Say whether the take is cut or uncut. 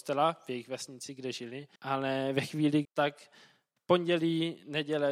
cut